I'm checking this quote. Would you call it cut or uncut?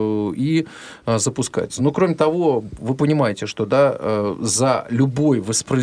uncut